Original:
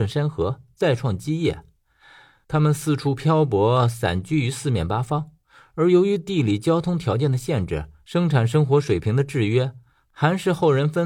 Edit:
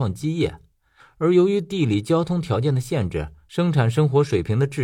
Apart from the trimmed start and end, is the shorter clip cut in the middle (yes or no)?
yes